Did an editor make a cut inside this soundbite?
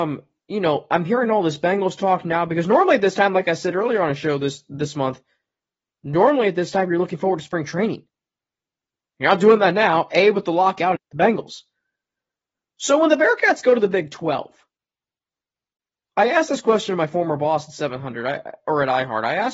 yes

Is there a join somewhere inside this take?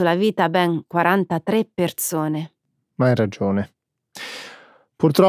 no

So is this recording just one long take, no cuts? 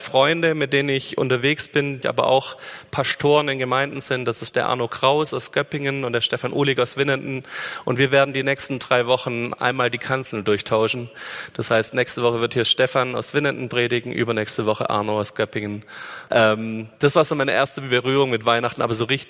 no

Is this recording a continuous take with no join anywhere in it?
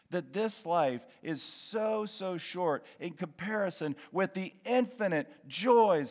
yes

